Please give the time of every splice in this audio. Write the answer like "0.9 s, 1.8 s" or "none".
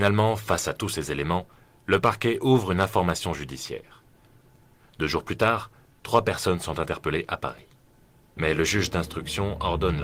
8.4 s

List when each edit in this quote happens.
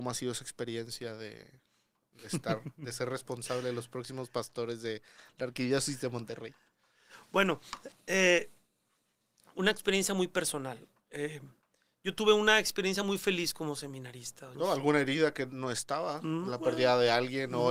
14.5 s

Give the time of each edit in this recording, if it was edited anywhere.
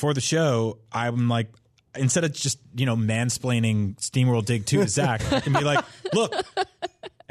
none

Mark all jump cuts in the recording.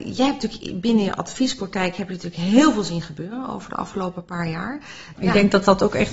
5.1 s

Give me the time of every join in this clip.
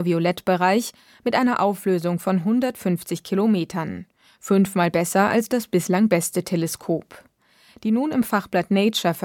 none

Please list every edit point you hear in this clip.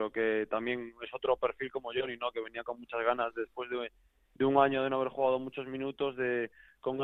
none

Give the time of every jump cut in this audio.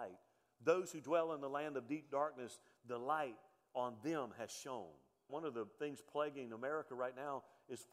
5.3 s

